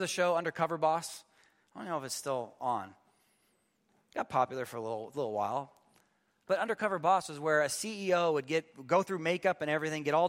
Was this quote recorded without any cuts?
yes; 0 cuts

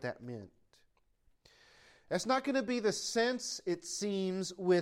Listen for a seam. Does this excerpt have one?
no; 0 cuts

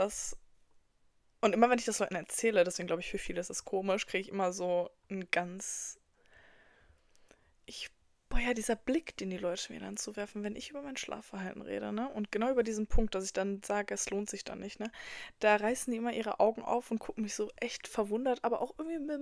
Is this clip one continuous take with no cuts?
yes; 0 cuts

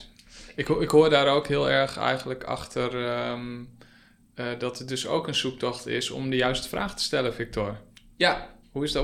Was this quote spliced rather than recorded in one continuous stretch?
no; 0 cuts

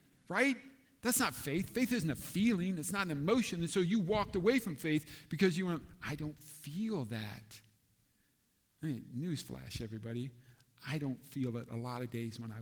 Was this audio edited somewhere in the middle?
no; 0 cuts

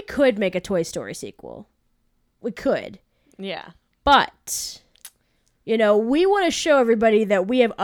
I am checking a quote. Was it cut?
no; 0 cuts

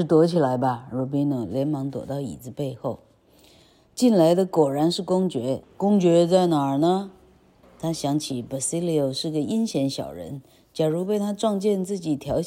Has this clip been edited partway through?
yes; 2 cuts; at 5.6 s, 7.6 s

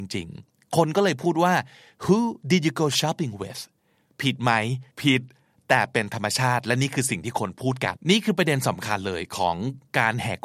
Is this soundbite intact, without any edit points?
no; 2 cuts; at 4.9 s, 8.0 s

